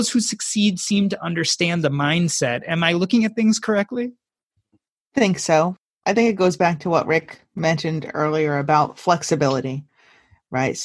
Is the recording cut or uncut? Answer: uncut